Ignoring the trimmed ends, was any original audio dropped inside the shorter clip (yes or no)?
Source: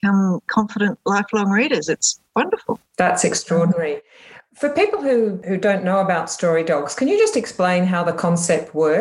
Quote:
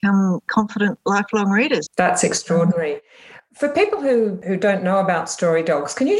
yes